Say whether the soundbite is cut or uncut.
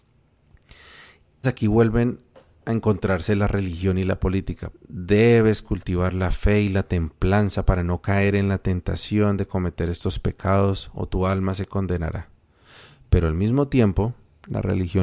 cut